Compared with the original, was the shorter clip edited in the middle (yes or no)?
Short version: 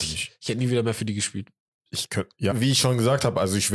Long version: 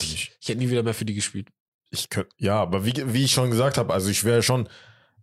yes